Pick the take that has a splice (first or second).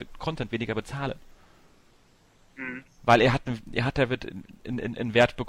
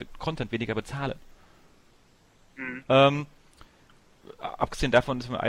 second